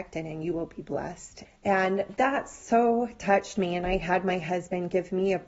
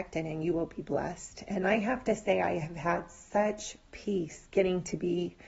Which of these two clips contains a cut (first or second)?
first